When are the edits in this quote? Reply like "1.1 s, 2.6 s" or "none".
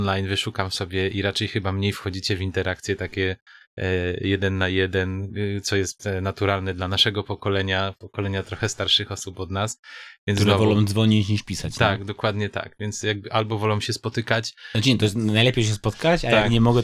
none